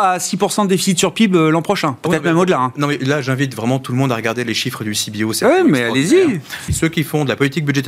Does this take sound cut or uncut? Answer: cut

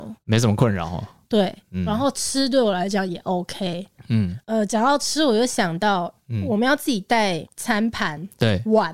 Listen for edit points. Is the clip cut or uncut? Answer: uncut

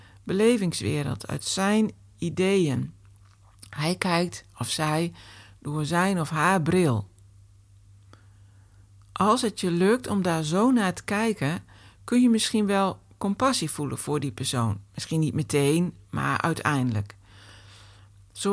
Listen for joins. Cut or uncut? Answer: uncut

